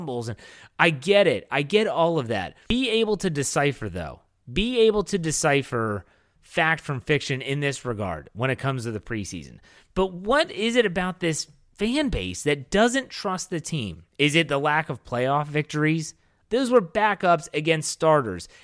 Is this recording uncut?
no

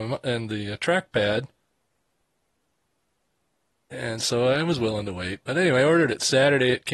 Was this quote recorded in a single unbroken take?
yes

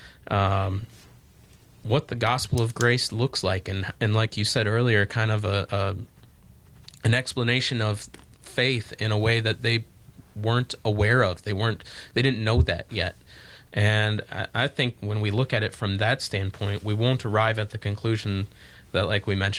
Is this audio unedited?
no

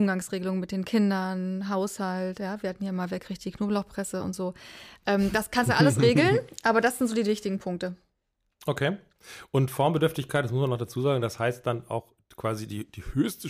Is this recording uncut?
yes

